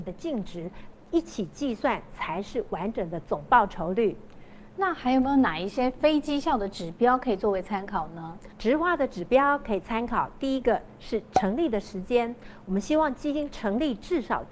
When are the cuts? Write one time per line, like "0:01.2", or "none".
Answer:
none

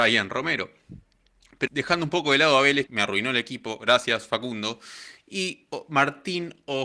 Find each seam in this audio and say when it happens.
0:01.7
0:02.9

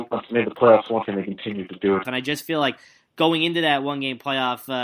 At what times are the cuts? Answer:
0:01.0
0:02.0

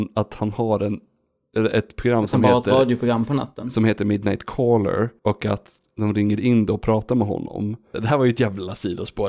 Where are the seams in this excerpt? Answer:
0:05.2
0:07.9

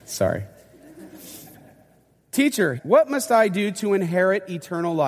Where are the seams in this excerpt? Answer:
0:02.8

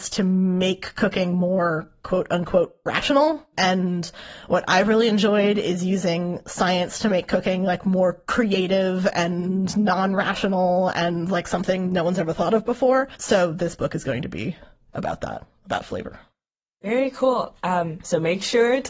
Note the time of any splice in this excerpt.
none

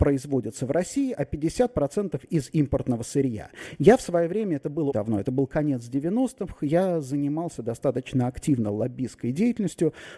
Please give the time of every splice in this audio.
0:03.8
0:04.9

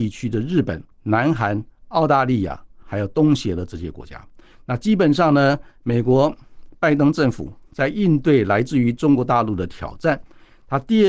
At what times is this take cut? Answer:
0:00.9

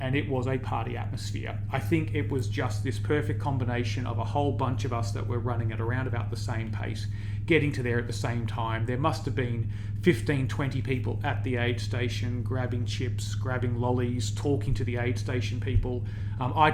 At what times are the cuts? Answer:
none

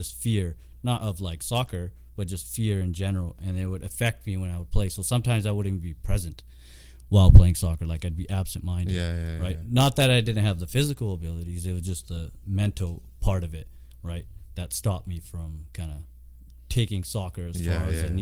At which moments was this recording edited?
none

